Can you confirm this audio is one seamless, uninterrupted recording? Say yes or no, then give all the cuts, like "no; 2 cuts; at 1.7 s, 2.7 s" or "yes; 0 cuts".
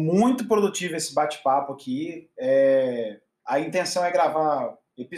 yes; 0 cuts